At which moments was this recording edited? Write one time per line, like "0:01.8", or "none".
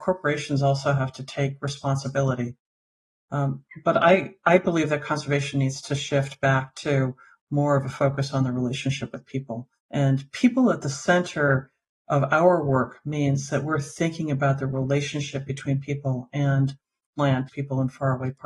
0:09.8
0:17.5